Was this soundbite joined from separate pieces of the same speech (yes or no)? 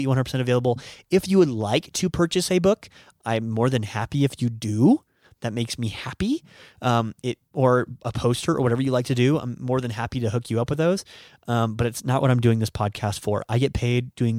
no